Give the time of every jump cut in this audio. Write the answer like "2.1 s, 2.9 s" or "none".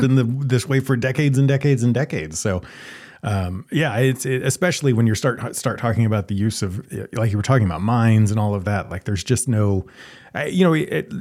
none